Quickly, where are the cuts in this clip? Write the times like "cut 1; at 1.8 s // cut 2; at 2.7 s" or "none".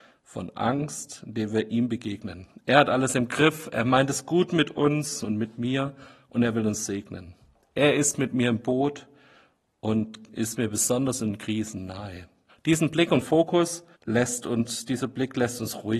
cut 1; at 12.5 s // cut 2; at 13.9 s